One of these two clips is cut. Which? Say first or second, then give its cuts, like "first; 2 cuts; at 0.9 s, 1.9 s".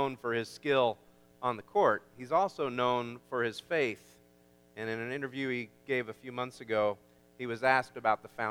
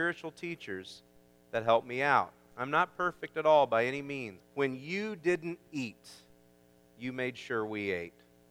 second; 1 cut; at 4.4 s